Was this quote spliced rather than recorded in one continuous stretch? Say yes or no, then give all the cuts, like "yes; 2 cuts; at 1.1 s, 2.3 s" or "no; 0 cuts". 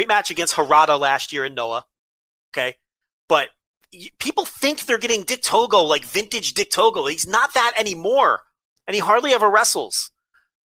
no; 0 cuts